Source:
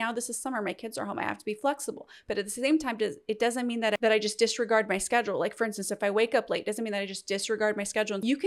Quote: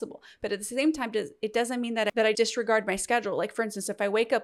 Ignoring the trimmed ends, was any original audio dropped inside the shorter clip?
yes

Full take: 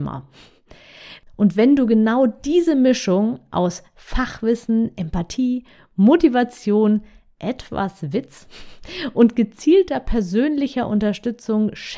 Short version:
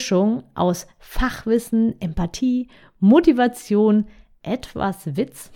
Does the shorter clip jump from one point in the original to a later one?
no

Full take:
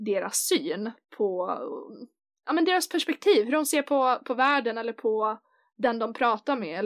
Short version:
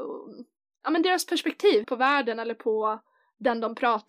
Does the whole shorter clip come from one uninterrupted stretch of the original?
no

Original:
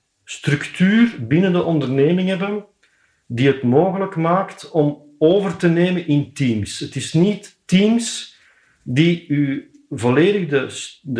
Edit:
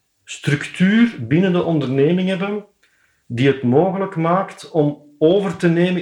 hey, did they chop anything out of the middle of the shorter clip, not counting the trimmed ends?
no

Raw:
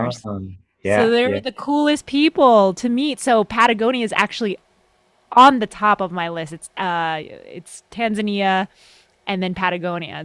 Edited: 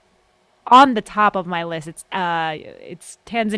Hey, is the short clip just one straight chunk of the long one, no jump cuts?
yes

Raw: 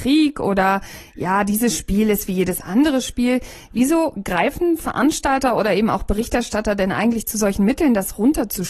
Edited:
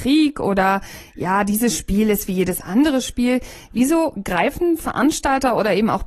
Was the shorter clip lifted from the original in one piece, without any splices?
yes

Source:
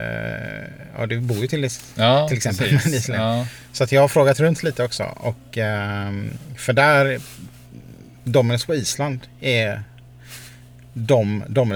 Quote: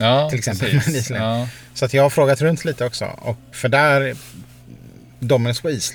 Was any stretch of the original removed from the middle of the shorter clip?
yes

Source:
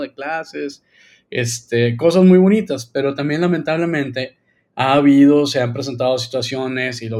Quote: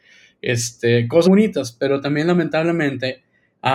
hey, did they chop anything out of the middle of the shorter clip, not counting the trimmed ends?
yes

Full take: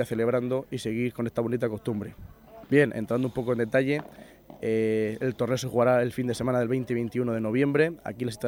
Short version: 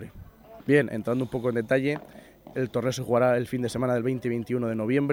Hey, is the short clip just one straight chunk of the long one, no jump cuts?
no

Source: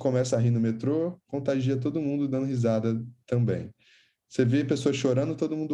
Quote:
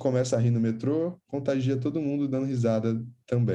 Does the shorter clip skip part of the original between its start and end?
no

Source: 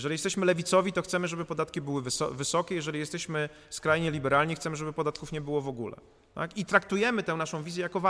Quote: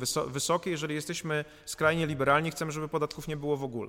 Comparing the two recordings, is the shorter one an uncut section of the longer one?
yes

